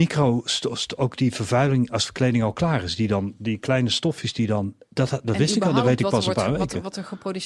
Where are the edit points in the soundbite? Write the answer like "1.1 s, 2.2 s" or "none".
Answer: none